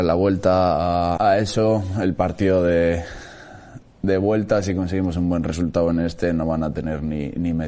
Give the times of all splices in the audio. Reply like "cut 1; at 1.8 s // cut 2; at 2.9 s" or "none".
cut 1; at 1.2 s